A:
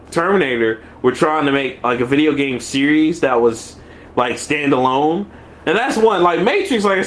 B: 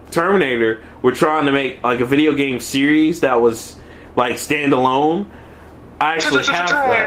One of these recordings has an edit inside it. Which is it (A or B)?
A